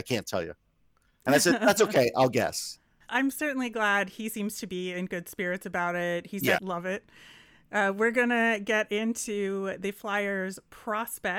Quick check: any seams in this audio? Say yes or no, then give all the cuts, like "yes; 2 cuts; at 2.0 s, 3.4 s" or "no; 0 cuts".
yes; 2 cuts; at 3.1 s, 6.6 s